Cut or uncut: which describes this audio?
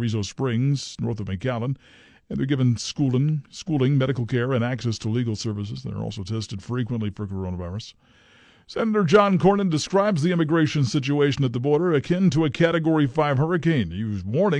uncut